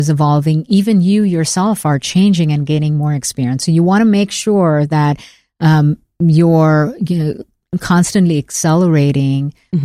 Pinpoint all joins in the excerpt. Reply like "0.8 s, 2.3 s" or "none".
none